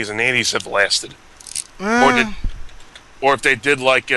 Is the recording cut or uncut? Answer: cut